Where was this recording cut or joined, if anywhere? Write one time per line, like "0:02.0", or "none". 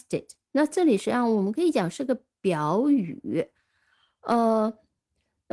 none